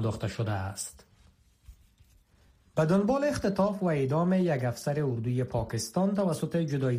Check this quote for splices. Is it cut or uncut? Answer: uncut